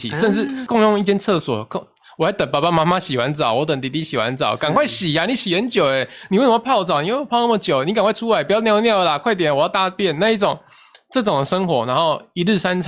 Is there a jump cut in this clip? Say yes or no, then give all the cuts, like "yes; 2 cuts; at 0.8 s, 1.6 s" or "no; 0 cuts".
no; 0 cuts